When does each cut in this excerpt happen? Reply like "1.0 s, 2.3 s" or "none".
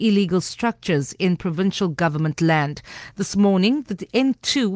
none